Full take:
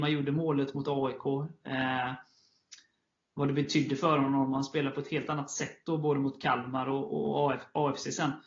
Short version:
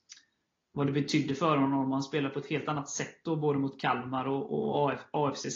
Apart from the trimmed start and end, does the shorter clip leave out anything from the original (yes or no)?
no